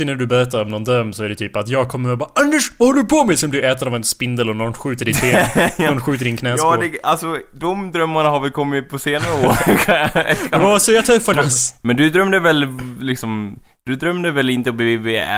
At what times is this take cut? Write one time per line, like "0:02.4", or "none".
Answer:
0:11.3

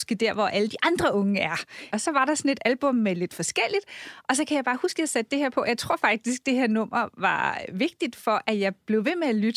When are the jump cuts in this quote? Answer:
0:01.9

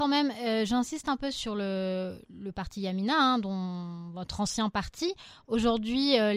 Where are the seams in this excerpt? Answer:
none

